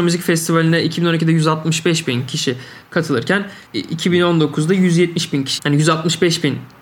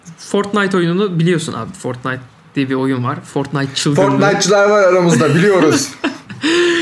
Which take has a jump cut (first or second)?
first